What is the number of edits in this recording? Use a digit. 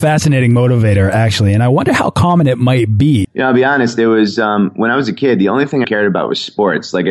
2